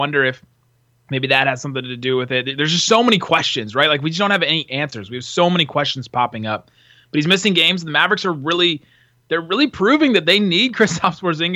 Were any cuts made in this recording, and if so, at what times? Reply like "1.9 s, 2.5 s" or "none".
none

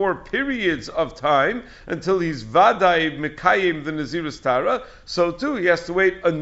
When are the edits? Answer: none

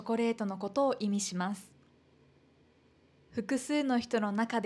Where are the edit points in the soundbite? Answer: 3.2 s

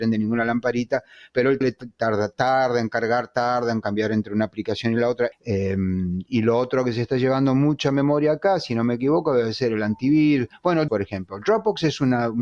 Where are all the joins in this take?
1.6 s, 5.3 s, 10.9 s

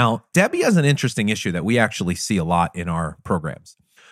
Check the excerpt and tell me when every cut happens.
none

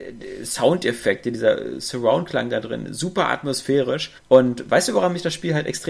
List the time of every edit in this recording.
4.2 s

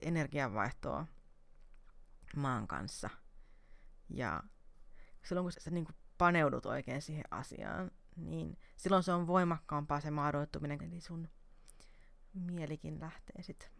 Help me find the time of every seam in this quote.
5.5 s, 10.8 s

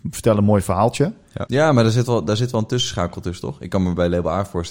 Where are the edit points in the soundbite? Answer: 1.5 s

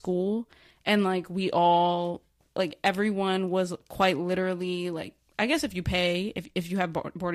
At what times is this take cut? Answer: none

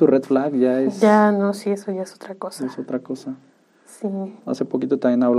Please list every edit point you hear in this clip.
4.4 s

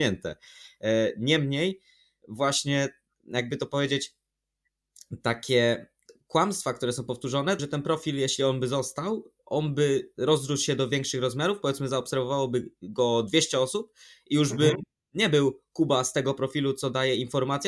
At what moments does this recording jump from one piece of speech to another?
7.6 s

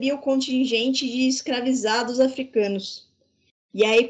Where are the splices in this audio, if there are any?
none

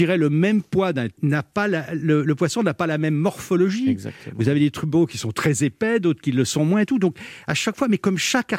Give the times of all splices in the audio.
1.2 s

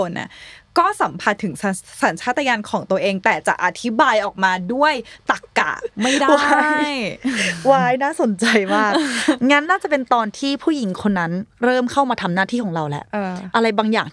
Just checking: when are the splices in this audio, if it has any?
9.6 s

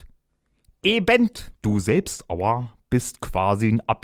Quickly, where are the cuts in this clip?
1.6 s

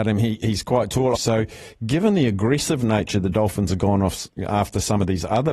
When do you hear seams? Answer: 1.1 s

